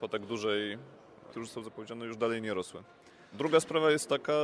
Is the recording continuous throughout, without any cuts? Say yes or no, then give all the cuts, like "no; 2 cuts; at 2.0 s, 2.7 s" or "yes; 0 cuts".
no; 2 cuts; at 1.3 s, 3.3 s